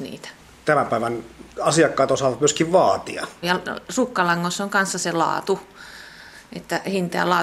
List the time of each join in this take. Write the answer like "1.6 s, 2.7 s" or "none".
1.5 s, 3.4 s